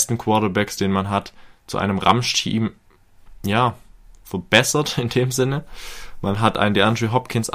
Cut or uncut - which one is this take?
uncut